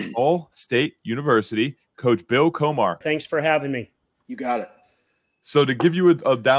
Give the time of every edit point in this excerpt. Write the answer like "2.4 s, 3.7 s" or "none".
3.0 s